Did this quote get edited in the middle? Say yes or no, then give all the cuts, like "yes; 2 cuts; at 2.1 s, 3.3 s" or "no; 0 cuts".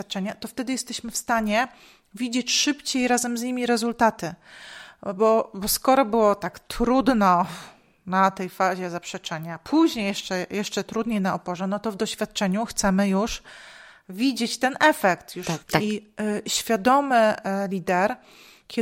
yes; 1 cut; at 15.6 s